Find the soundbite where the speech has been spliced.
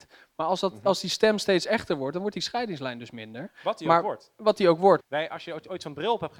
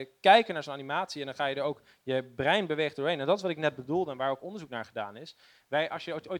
first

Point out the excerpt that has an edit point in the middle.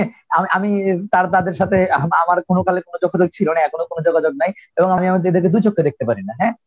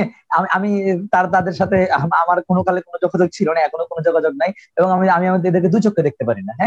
first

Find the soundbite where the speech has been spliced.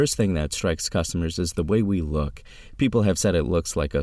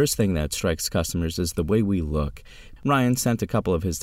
second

